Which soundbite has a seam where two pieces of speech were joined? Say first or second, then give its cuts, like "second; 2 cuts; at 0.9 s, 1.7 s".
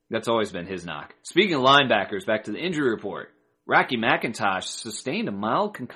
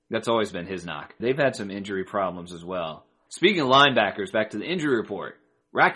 second; 2 cuts; at 1.2 s, 3.3 s